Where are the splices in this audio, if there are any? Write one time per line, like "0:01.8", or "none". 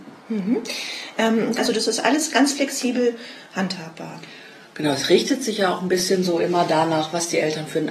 0:01.6